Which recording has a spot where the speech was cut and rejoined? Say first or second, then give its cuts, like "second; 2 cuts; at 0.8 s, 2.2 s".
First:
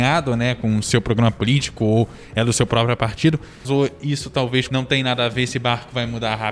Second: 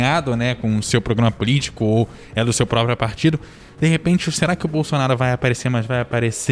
first; 2 cuts; at 3.6 s, 4.7 s